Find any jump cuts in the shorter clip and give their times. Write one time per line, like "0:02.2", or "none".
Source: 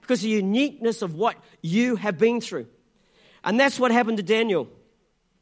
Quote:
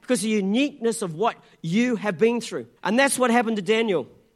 0:02.8